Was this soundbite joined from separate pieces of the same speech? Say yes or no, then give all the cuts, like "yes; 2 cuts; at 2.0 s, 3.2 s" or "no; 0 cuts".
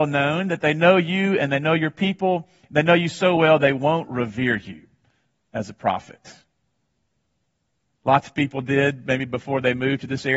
yes; 1 cut; at 7.9 s